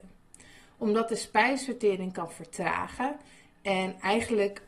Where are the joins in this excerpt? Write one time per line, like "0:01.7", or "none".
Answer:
none